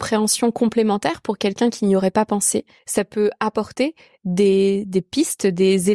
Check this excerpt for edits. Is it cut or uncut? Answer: uncut